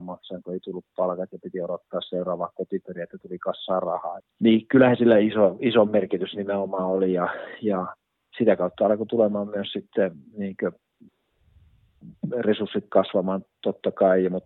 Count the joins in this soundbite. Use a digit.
1